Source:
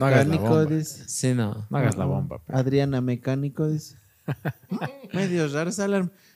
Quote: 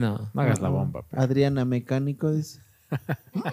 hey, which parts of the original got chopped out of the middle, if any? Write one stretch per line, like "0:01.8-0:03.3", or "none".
none